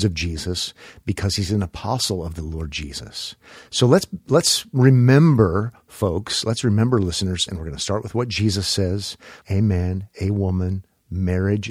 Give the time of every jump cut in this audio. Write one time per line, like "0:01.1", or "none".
0:07.5
0:09.4